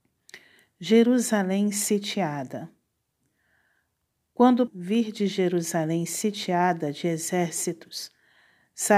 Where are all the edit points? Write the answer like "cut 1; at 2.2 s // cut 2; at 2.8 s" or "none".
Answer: cut 1; at 4.7 s